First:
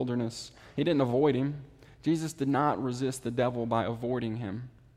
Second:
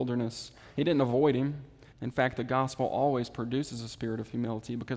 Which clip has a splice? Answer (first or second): second